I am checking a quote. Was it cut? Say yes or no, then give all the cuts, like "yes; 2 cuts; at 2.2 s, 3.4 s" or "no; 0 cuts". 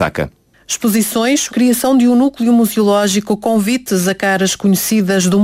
yes; 1 cut; at 1.5 s